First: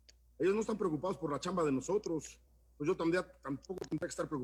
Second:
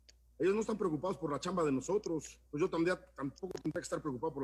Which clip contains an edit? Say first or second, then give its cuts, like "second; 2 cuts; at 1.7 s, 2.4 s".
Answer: second; 1 cut; at 2.5 s